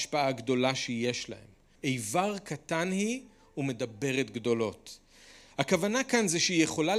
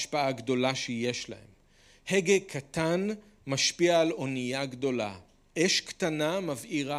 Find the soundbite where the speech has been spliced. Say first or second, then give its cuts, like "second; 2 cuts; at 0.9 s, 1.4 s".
first; 1 cut; at 1.8 s